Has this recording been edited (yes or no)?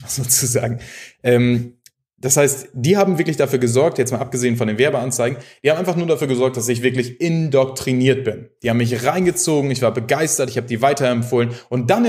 no